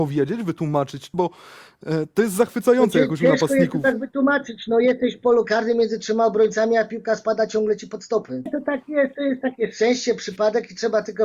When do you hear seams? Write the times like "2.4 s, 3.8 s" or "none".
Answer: 1.1 s, 8.5 s